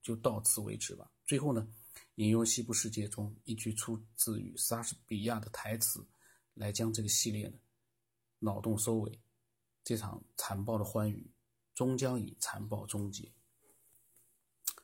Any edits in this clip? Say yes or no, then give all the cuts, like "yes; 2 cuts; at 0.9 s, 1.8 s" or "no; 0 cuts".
no; 0 cuts